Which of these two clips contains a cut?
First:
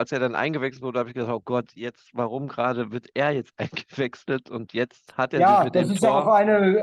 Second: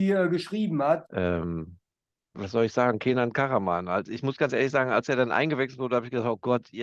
second; 1 cut; at 1.0 s

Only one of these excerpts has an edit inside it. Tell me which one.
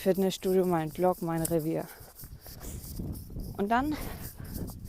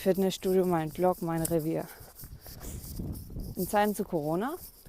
second; 1 cut; at 3.5 s

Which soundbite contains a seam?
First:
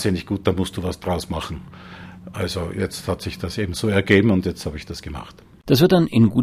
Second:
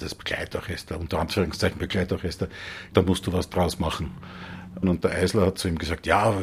second; 2 cuts; at 2.9 s, 4.8 s

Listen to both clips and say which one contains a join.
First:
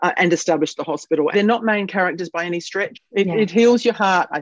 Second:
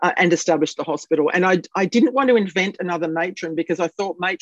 first; 2 cuts; at 1.3 s, 2.9 s

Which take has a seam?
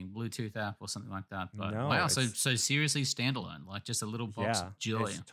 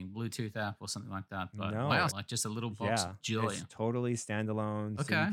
second; 1 cut; at 2.1 s

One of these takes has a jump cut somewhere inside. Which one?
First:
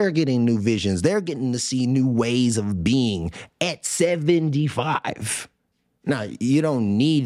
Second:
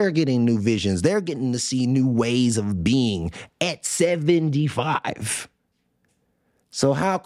first; 1 cut; at 6.0 s

